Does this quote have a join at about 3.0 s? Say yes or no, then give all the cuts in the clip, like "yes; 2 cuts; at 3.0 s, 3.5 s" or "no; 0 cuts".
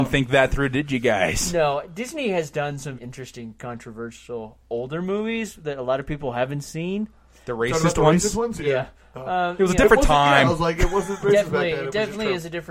yes; 1 cut; at 3.0 s